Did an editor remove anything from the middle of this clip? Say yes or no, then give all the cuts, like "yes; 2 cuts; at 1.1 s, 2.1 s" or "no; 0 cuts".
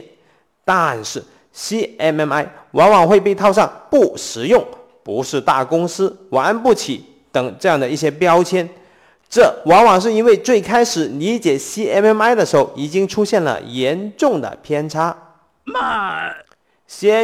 no; 0 cuts